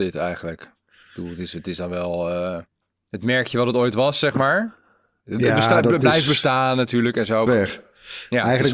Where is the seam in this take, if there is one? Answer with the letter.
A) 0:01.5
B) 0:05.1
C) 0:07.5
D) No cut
C